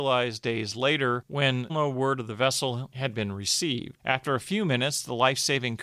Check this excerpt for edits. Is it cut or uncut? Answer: cut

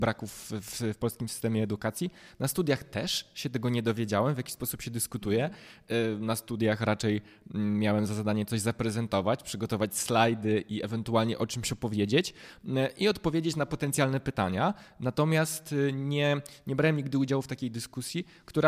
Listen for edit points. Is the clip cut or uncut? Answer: uncut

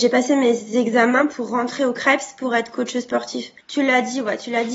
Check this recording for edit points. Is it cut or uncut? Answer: cut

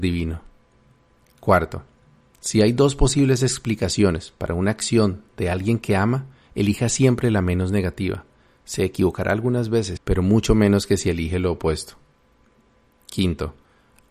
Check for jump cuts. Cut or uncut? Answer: cut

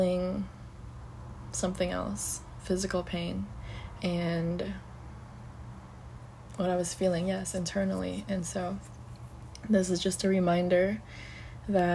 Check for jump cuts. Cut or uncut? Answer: cut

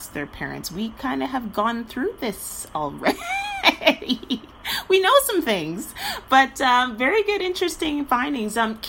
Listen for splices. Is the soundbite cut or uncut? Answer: uncut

